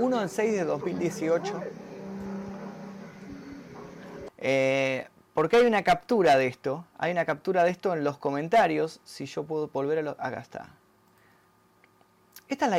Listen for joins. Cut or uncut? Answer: cut